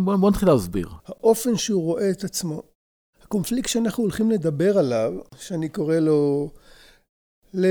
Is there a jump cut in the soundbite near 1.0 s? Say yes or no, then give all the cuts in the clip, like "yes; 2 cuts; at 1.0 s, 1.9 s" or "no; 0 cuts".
yes; 1 cut; at 1.0 s